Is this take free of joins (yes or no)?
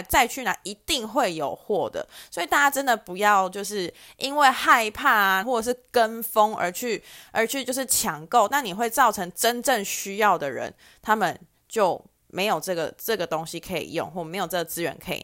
no